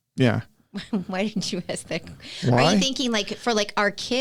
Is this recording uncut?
yes; 0 cuts

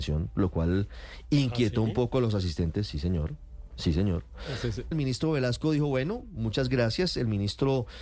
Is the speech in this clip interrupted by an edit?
yes; 1 cut; at 4.9 s

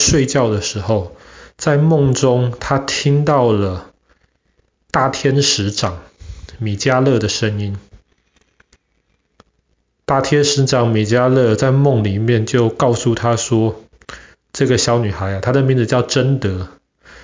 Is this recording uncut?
yes; 0 cuts

